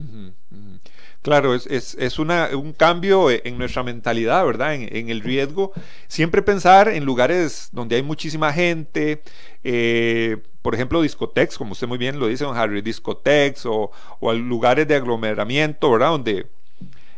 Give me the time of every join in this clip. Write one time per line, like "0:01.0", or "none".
none